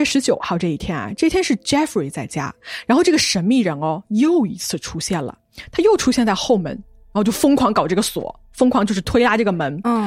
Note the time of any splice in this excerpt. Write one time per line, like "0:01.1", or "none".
none